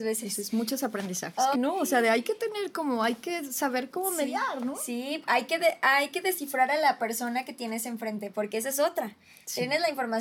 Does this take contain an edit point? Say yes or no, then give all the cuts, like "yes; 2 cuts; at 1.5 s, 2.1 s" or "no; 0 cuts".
yes; 1 cut; at 1.5 s